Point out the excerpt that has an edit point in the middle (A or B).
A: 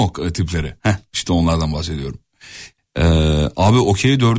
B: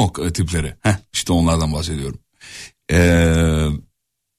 A